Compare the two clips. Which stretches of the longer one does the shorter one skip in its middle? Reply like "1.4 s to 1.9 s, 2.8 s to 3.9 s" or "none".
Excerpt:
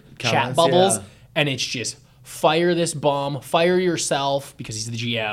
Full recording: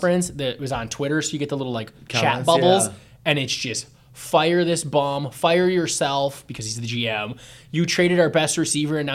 none